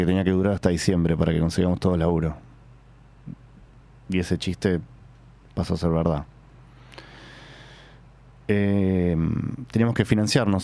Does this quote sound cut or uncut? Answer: uncut